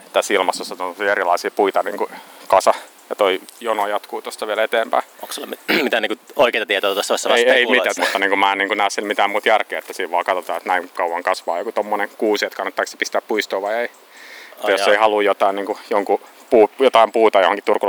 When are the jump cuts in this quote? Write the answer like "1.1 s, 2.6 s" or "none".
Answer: 8.0 s